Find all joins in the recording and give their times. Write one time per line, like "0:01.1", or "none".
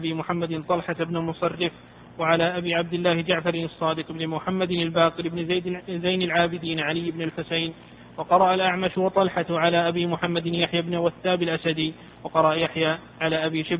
none